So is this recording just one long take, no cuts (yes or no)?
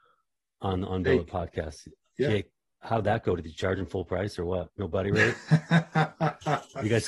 yes